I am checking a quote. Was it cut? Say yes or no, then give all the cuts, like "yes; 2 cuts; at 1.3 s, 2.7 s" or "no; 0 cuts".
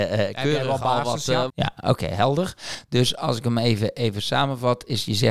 yes; 1 cut; at 1.5 s